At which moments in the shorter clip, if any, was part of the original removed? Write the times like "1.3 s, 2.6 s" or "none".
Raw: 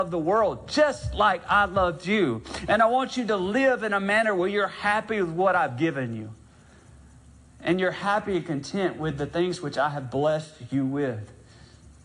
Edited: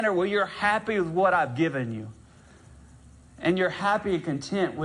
none

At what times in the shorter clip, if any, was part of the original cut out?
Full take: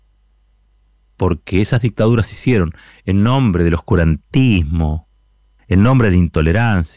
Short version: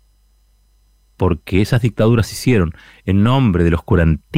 none

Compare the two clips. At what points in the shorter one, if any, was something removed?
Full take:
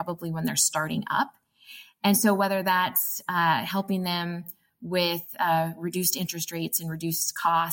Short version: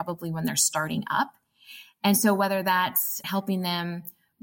3.2 s

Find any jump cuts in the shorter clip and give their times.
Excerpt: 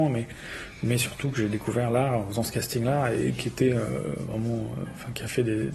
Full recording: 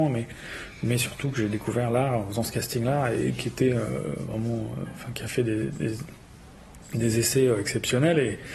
none

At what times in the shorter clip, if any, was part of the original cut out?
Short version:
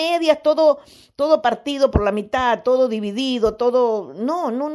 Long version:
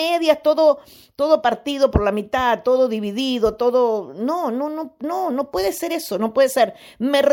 none

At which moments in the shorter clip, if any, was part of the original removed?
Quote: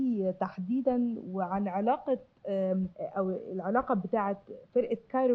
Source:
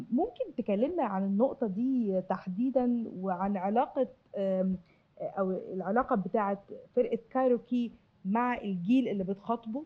2.9 s

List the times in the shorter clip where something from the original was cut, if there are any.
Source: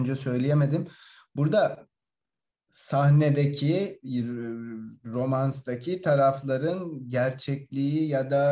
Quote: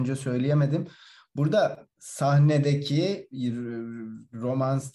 1.9 s

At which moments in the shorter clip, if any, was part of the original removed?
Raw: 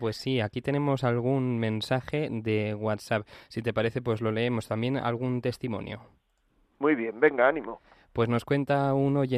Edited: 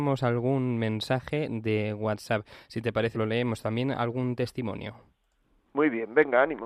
3.1 s

